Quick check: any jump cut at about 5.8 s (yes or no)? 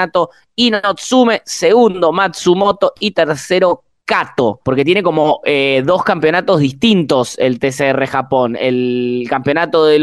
no